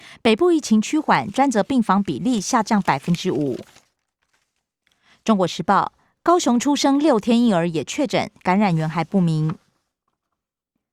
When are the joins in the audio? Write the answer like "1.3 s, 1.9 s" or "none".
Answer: none